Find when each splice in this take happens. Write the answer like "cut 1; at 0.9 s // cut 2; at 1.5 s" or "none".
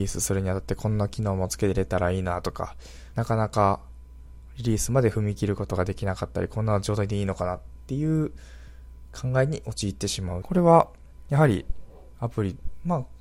cut 1; at 3.1 s // cut 2; at 10.4 s